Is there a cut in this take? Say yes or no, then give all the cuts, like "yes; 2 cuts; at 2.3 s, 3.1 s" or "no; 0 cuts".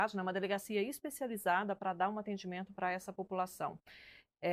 no; 0 cuts